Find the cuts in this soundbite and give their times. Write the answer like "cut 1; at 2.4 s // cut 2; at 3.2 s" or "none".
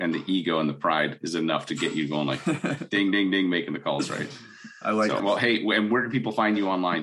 cut 1; at 5.2 s